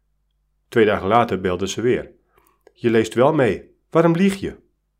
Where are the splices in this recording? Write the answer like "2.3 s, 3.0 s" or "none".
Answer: 2.7 s